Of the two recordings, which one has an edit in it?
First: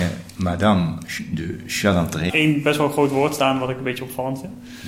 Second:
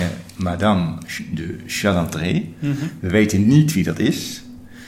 first; 1 cut; at 2.3 s

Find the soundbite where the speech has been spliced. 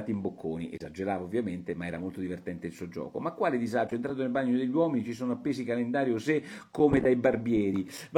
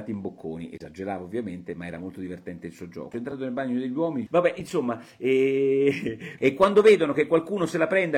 second; 3 cuts; at 3.1 s, 4.3 s, 6.4 s

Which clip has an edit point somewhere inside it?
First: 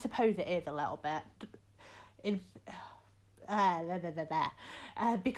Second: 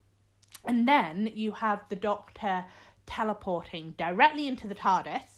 first; 1 cut; at 1.4 s

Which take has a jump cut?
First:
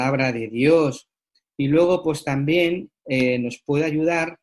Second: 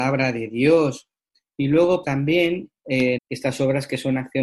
second; 2 cuts; at 2.0 s, 3.2 s

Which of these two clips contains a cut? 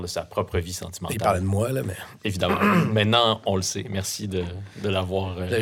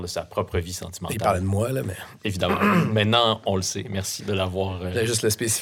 second; 1 cut; at 4.2 s

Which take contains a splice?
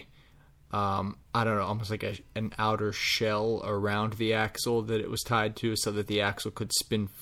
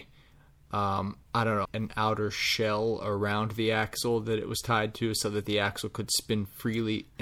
second; 1 cut; at 1.7 s

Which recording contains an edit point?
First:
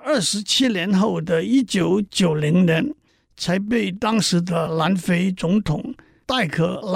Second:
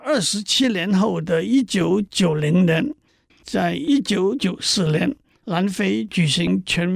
second; 1 cut; at 3.3 s

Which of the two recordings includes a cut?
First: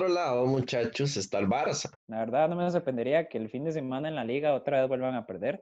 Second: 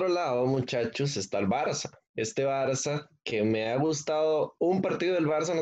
first; 1 cut; at 1.9 s

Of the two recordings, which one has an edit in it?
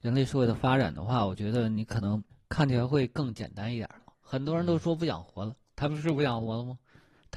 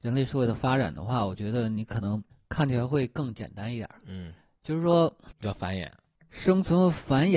first; 1 cut; at 4.0 s

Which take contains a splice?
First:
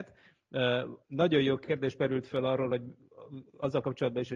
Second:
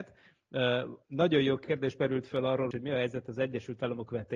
second; 1 cut; at 2.7 s

